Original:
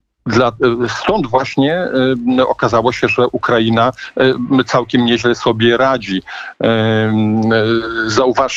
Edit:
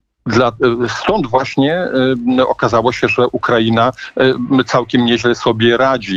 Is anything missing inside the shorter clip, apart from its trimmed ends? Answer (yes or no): no